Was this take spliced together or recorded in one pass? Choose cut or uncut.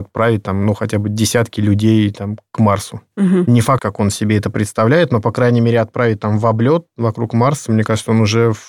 cut